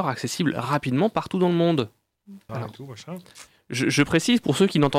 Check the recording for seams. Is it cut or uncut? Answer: cut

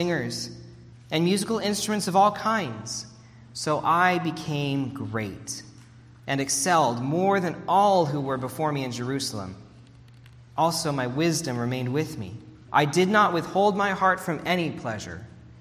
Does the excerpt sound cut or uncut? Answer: cut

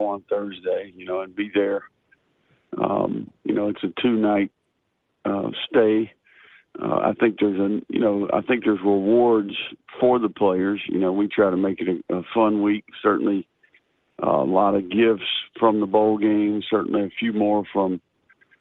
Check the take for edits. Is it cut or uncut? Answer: uncut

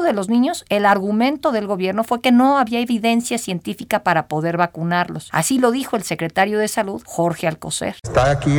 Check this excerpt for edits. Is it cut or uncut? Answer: uncut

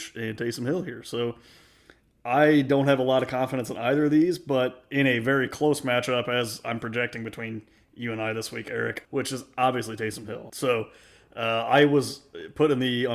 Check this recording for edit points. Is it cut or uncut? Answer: cut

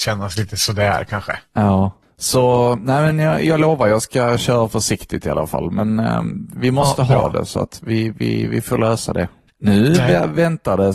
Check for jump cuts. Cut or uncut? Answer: cut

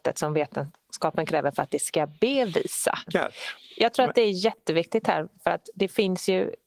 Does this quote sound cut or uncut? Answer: cut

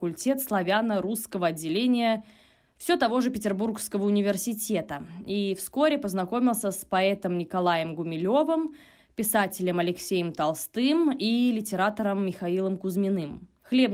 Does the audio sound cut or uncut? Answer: uncut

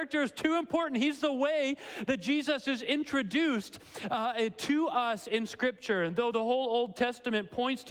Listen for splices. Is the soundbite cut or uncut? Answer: uncut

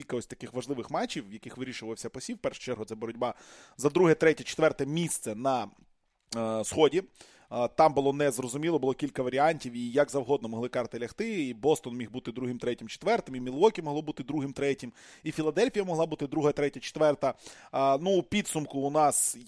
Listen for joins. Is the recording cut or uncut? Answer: uncut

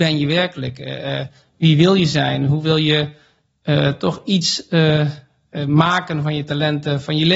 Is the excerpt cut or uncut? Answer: uncut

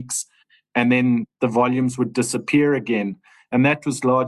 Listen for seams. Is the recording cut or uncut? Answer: uncut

